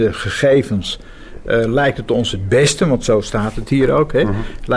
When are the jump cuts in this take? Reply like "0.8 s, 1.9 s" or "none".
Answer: none